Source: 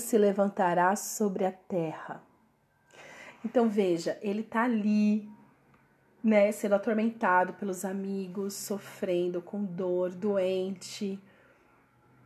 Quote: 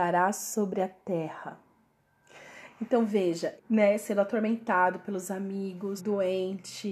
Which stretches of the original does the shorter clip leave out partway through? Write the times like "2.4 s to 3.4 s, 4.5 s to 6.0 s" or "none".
4.2 s to 6.1 s, 8.5 s to 10.1 s